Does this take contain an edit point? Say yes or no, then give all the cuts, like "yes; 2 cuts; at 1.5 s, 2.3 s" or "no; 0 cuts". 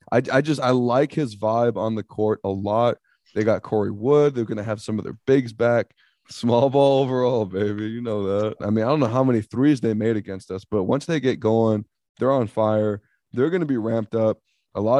yes; 2 cuts; at 6.2 s, 8.6 s